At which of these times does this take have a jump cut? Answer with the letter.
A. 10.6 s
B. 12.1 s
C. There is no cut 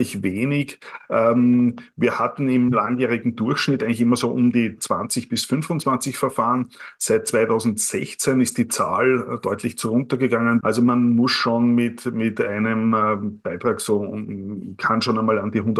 A